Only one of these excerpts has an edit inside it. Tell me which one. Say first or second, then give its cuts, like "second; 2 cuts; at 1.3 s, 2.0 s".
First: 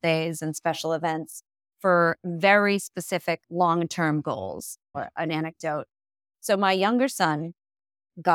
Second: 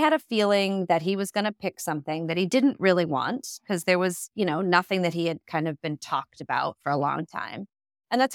first; 2 cuts; at 3.4 s, 4.9 s